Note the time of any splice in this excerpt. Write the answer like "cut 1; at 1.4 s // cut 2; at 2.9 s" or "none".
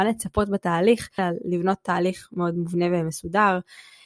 cut 1; at 1.2 s